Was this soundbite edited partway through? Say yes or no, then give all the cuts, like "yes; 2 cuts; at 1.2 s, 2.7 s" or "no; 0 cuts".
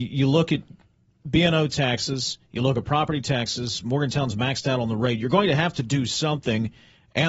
no; 0 cuts